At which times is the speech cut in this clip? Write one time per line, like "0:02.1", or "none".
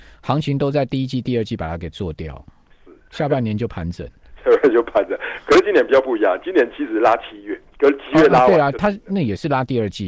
none